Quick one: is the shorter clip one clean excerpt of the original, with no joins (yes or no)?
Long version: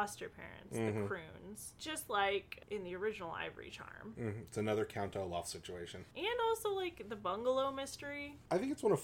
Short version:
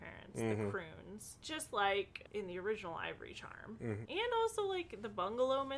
no